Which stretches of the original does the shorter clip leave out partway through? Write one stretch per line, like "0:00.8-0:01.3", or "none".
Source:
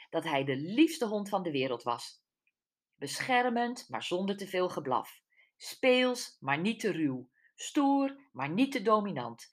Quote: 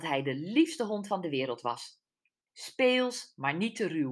0:02.7-0:05.5